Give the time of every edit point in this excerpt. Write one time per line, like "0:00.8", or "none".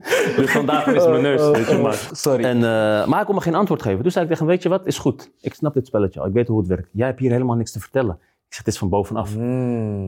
0:02.1